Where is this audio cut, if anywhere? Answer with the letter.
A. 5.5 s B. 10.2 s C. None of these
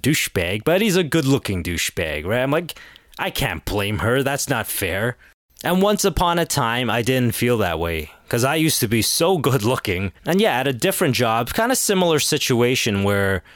B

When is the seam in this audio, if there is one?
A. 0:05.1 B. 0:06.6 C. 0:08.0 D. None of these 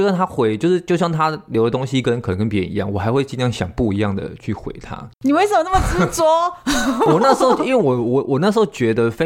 A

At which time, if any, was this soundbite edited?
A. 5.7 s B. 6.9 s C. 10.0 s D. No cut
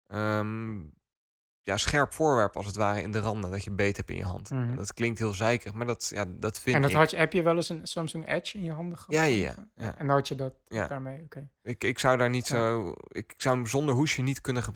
D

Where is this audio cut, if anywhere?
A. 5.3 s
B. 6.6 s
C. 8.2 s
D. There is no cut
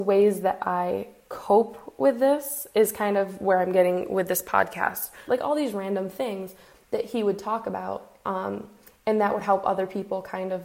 A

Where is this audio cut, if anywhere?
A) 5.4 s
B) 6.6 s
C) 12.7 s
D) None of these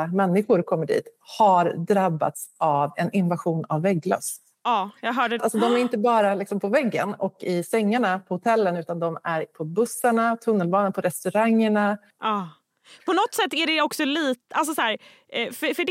A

